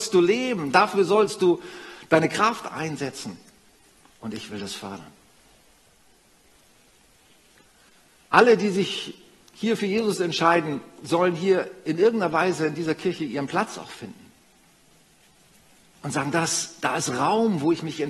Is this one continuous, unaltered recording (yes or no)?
yes